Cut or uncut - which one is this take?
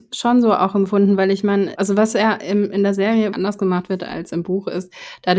cut